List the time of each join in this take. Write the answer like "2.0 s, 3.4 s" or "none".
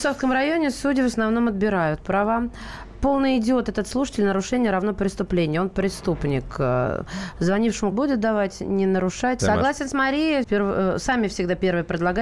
7.9 s, 9.4 s, 10.4 s